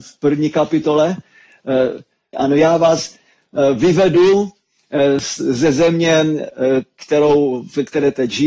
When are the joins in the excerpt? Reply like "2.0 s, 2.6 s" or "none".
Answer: 2.3 s